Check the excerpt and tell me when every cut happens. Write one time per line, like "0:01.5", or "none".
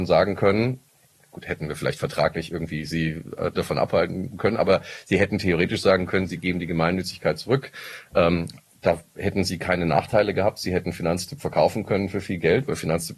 none

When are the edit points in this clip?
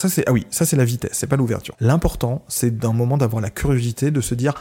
0:01.7

